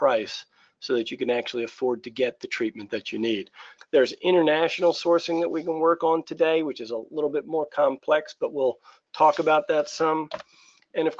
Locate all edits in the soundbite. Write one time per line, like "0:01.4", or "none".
0:03.8